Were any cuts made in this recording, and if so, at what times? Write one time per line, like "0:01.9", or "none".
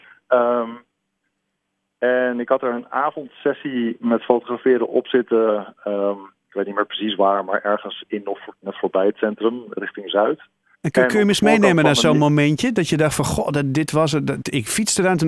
0:10.7